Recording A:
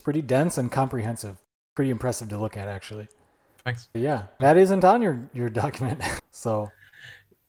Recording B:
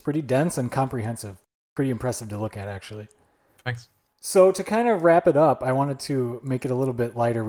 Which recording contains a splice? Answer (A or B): A